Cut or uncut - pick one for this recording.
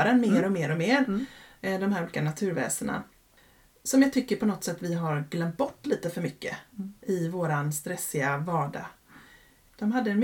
uncut